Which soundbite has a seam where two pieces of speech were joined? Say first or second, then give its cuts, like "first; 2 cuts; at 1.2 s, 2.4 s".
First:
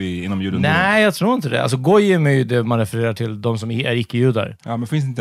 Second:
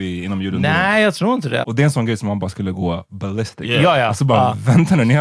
second; 1 cut; at 1.6 s